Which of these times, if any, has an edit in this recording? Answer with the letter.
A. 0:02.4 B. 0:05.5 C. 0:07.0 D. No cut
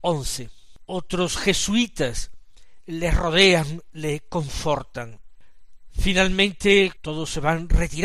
C